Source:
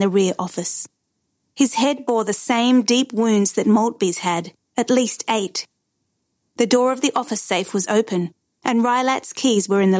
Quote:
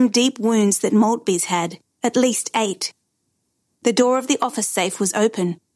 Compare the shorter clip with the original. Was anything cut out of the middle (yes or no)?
no